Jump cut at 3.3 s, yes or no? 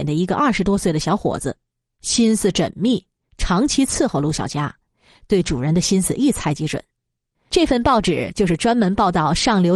no